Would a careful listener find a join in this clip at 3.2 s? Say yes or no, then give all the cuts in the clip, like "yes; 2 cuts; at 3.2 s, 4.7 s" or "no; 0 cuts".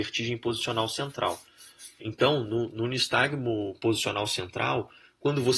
no; 1 cut; at 2.0 s